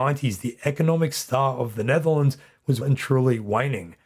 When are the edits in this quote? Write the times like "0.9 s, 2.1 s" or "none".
2.8 s